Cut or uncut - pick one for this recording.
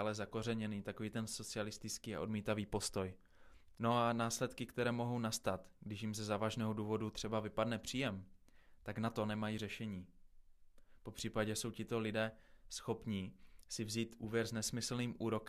cut